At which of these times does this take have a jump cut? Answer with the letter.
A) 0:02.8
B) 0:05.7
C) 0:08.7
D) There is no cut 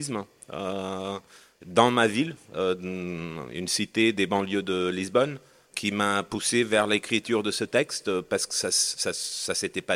B